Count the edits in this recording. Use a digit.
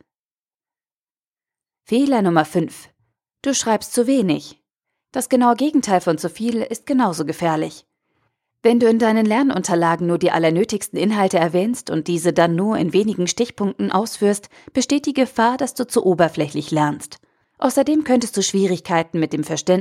1